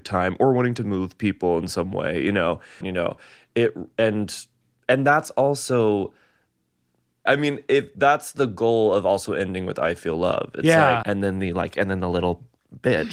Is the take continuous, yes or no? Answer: no